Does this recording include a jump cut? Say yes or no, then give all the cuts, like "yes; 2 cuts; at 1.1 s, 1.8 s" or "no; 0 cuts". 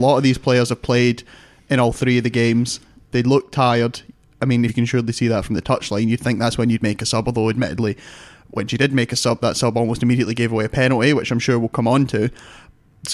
yes; 1 cut; at 4.7 s